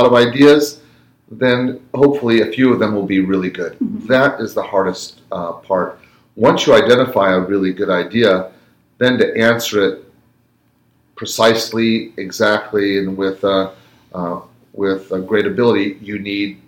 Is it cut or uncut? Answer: uncut